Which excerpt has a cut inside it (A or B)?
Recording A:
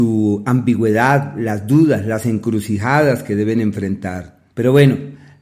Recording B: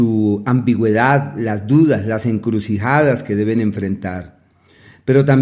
A